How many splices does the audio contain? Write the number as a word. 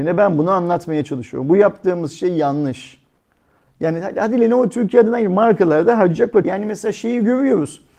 two